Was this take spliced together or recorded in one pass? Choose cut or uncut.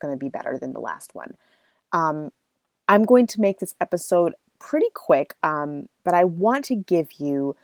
cut